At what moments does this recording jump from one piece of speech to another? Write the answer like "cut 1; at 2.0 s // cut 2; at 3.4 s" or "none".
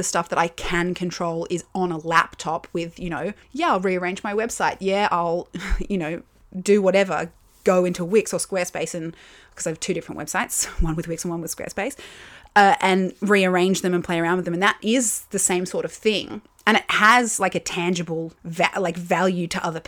cut 1; at 3.4 s // cut 2; at 18.4 s